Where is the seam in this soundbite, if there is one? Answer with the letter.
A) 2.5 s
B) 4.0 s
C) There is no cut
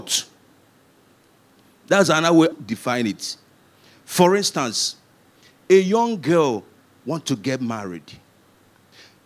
A